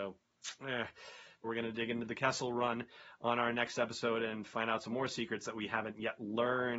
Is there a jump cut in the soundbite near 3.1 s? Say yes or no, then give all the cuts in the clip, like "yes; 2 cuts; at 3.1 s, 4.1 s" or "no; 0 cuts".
no; 1 cut; at 1.4 s